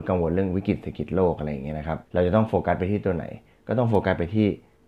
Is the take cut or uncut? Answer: cut